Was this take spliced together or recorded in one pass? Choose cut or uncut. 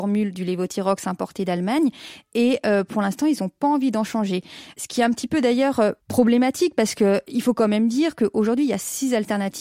uncut